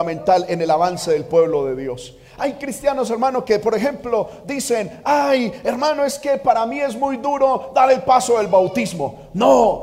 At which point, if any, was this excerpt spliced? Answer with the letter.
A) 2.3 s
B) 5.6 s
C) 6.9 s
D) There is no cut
D